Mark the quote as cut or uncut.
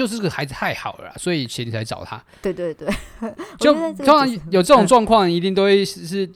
uncut